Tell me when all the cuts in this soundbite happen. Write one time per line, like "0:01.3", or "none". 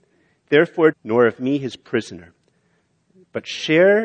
0:00.9